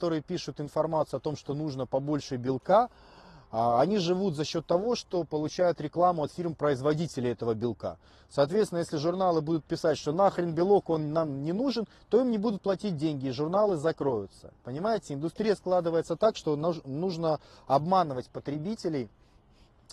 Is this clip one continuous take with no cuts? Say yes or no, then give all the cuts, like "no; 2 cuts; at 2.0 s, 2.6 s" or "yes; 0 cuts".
yes; 0 cuts